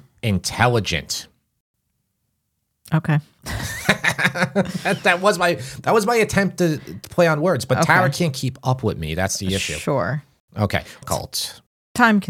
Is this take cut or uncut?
cut